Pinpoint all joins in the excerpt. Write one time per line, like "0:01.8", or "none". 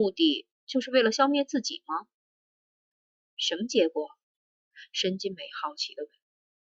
0:02.6